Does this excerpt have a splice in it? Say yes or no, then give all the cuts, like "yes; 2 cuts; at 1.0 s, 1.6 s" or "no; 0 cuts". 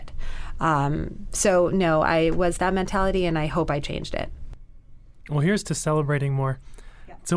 no; 0 cuts